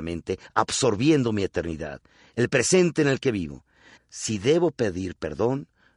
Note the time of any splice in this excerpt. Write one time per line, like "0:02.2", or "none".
0:04.0